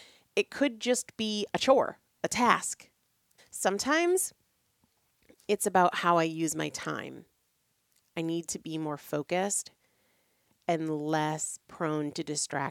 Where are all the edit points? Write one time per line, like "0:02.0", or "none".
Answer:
0:03.4